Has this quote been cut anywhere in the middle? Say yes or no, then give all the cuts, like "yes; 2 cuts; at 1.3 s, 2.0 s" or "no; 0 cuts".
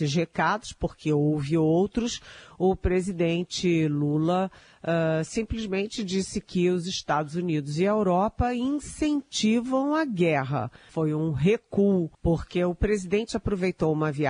yes; 2 cuts; at 10.9 s, 12.1 s